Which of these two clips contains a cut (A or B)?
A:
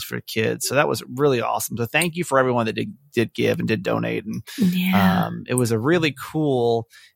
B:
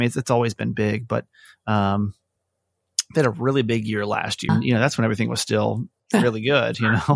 B